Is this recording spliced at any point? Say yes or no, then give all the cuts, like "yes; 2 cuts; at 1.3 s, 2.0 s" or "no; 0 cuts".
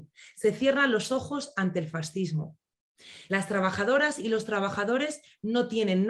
yes; 1 cut; at 3.3 s